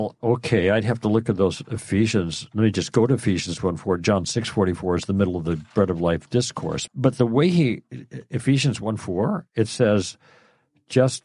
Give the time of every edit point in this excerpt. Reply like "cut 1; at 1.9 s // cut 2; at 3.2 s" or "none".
cut 1; at 6.9 s

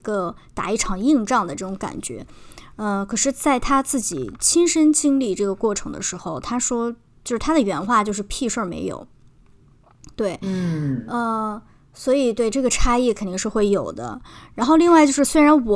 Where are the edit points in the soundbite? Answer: none

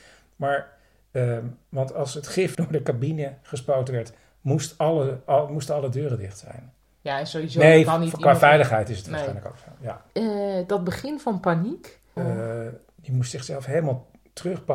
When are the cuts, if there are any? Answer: cut 1; at 2.5 s // cut 2; at 10.1 s // cut 3; at 12.2 s

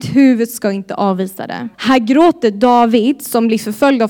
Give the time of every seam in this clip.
cut 1; at 1.7 s

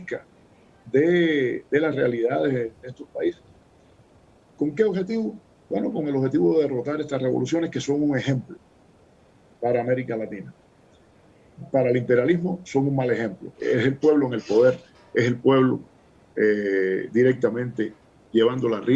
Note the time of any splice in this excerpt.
cut 1; at 13.5 s

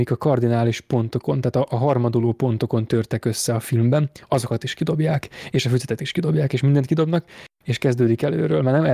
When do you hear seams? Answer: none

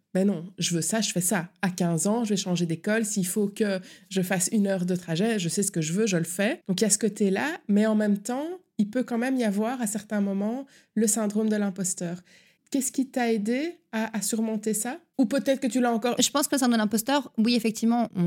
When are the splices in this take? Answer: cut 1; at 16.2 s

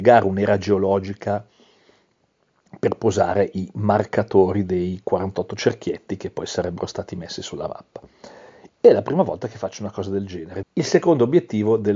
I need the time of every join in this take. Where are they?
cut 1; at 8.7 s // cut 2; at 10.6 s

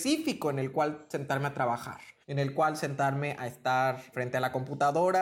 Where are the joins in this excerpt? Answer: cut 1; at 2.2 s // cut 2; at 4.1 s

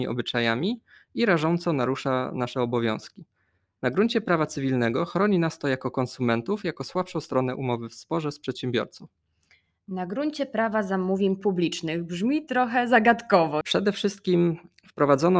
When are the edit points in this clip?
cut 1; at 13.6 s

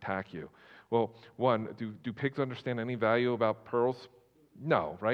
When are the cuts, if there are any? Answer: none

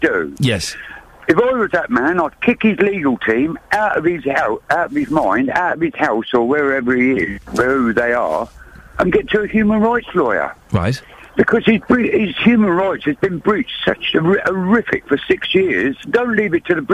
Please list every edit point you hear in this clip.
cut 1; at 11.3 s // cut 2; at 16.0 s

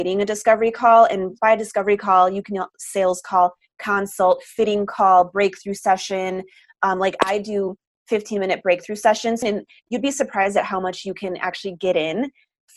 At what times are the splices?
cut 1; at 9.4 s

